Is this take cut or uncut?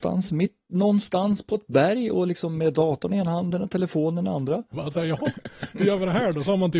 cut